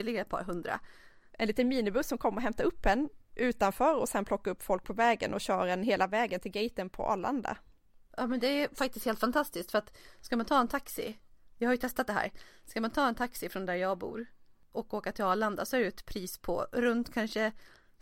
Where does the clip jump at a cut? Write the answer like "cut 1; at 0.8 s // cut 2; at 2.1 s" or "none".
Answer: cut 1; at 1.3 s